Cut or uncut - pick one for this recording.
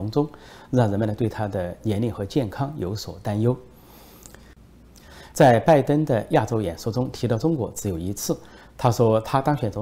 cut